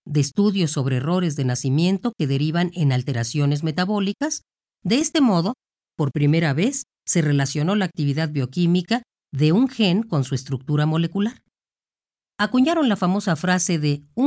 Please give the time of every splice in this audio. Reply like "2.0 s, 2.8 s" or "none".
4.7 s